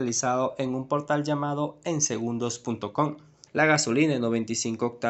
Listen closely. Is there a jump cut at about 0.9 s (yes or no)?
no